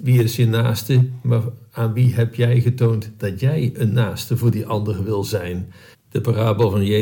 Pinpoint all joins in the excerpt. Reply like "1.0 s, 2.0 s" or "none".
5.9 s